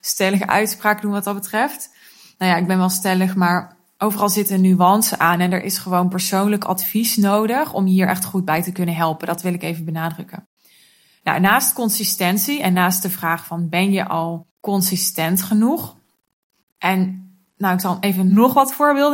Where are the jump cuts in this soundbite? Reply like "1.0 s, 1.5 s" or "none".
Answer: 14.5 s

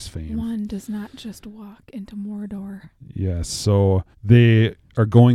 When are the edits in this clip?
4.1 s

